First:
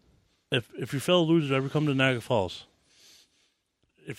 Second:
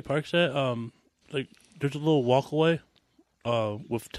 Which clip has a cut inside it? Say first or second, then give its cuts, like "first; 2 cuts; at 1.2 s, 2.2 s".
second; 1 cut; at 1.2 s